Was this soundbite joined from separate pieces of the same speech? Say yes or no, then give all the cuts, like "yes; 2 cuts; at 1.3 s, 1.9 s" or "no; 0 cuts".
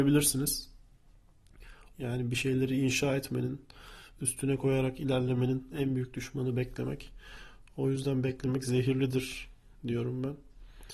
yes; 1 cut; at 1.9 s